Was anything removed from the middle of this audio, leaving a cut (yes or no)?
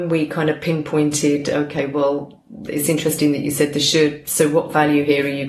no